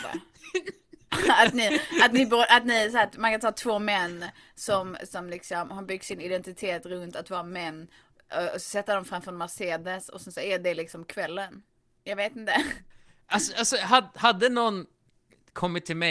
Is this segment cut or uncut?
uncut